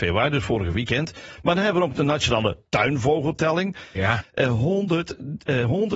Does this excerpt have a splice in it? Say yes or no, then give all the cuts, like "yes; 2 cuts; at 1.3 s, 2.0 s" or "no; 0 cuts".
yes; 1 cut; at 4.2 s